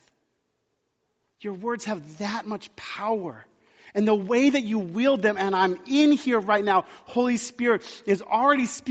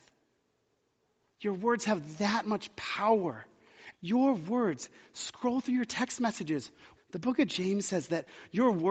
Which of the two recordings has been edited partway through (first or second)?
second